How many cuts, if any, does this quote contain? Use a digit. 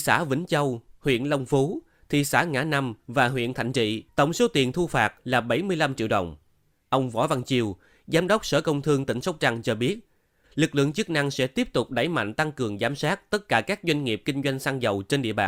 3